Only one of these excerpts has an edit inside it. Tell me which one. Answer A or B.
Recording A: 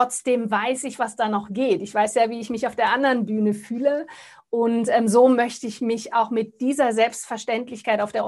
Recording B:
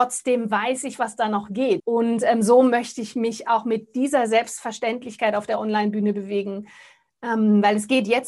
B